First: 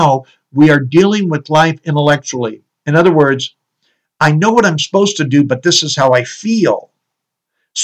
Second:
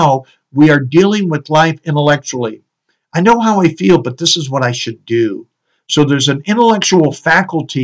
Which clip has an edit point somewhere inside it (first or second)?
first